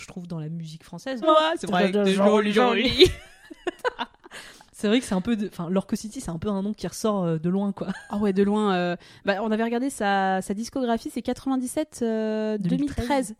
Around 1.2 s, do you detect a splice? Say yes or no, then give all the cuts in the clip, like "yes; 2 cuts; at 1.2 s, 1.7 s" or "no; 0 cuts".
yes; 1 cut; at 1.2 s